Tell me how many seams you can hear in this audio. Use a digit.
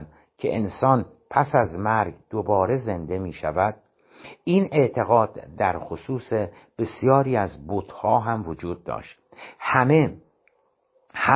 0